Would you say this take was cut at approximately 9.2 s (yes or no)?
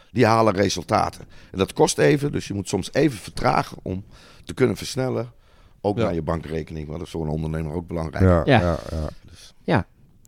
yes